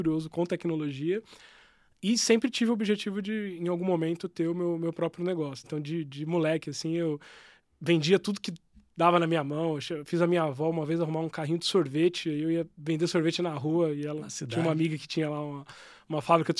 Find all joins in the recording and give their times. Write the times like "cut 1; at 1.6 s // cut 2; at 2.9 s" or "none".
cut 1; at 5.6 s